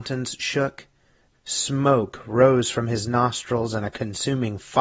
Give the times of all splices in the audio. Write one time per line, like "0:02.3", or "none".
0:01.3